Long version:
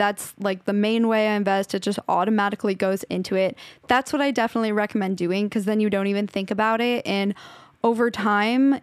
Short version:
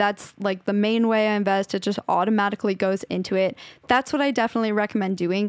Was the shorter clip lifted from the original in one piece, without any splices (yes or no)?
yes